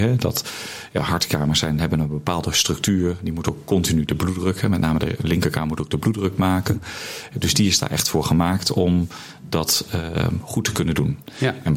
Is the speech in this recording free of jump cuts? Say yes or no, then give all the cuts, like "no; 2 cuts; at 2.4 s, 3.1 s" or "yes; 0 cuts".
yes; 0 cuts